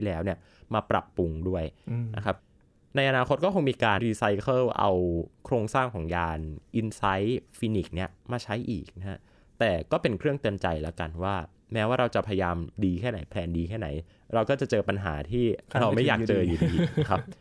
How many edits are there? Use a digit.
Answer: 1